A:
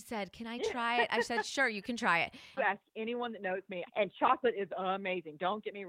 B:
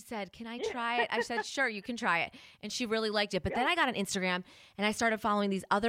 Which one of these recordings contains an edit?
A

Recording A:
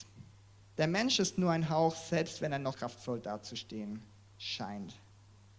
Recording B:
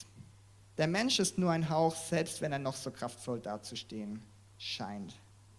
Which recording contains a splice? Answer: A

